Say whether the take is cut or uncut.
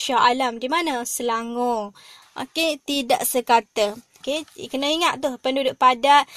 cut